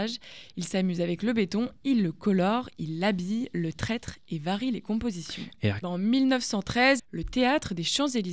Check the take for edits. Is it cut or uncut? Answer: cut